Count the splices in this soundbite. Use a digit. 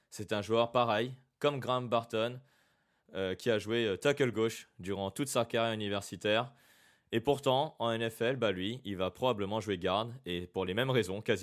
0